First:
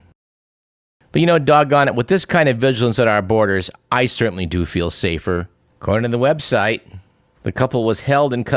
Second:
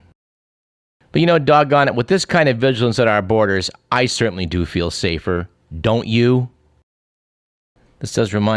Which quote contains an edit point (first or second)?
first